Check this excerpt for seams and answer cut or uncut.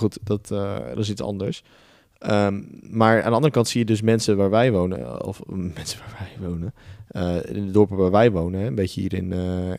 uncut